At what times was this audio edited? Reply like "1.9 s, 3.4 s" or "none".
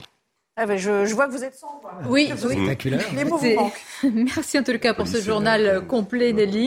none